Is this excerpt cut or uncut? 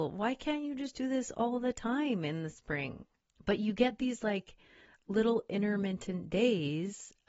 cut